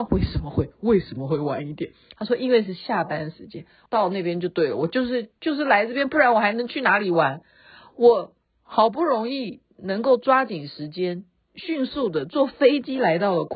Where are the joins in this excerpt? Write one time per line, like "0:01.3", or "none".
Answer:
0:03.9